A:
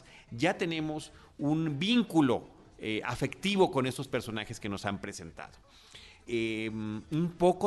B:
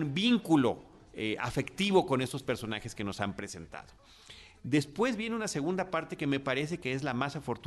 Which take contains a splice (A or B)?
A